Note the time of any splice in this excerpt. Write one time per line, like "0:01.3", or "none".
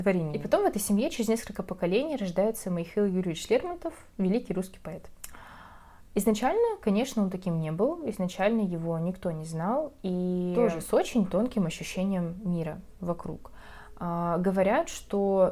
none